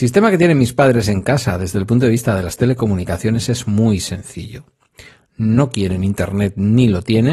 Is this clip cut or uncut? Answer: uncut